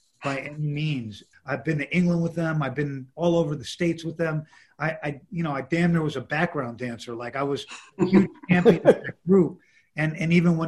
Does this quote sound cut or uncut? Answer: cut